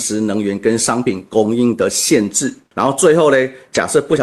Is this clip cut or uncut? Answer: cut